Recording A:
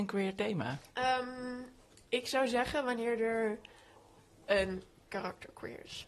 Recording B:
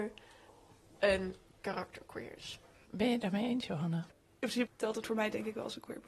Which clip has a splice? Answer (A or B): B